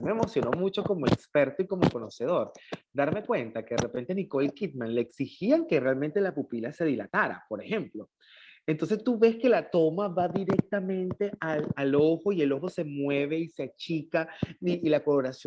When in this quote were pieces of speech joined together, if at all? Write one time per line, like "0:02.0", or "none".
none